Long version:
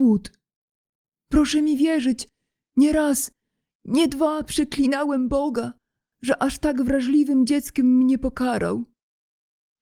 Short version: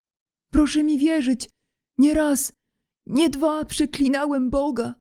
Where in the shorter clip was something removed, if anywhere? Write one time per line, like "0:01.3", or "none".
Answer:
none